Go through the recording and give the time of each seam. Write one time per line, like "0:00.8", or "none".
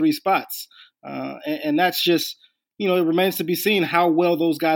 none